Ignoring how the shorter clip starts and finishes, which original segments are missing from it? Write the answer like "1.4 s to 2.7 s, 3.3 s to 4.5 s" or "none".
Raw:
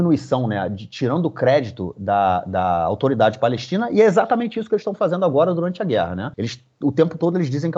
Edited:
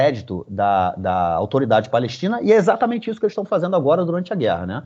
none